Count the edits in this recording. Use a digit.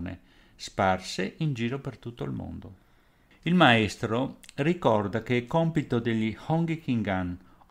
1